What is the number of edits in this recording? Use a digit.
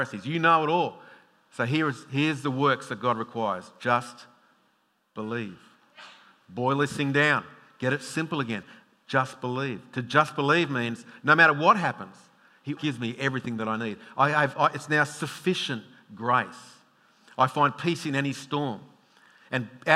1